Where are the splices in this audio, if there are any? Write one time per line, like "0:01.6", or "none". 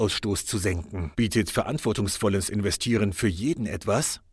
0:01.1